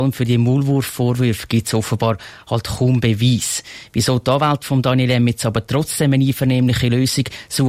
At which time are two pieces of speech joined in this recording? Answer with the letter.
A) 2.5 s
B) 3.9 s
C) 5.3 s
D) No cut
D